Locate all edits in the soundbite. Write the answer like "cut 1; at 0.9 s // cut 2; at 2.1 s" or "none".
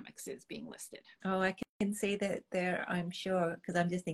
cut 1; at 1.2 s